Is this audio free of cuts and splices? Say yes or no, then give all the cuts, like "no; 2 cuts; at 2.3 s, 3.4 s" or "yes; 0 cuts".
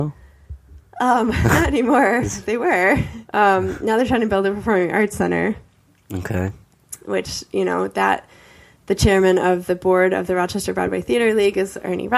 no; 1 cut; at 3.2 s